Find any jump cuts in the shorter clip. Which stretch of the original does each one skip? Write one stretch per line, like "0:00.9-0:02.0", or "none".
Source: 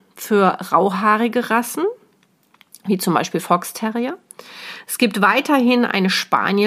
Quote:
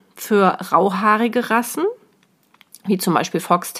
none